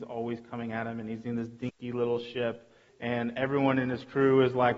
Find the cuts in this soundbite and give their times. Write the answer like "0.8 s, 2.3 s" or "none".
2.9 s